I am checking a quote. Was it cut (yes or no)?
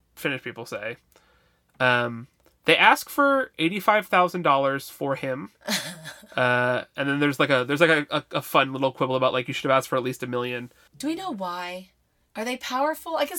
no